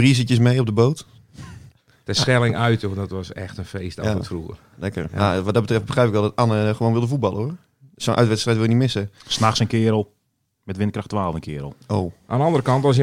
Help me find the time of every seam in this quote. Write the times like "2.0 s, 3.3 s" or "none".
none